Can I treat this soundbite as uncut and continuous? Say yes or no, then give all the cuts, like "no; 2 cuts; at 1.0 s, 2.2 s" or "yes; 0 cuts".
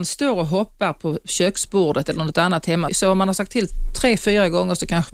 no; 1 cut; at 2.9 s